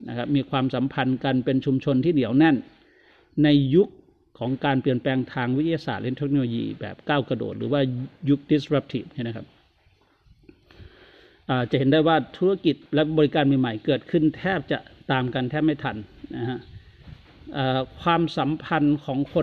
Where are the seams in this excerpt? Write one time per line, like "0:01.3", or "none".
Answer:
0:12.9